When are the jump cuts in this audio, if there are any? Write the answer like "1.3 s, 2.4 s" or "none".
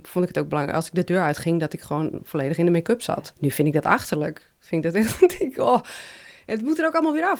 3.3 s